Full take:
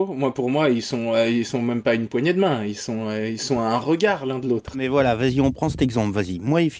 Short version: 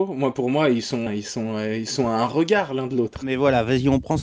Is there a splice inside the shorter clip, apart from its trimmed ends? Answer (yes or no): yes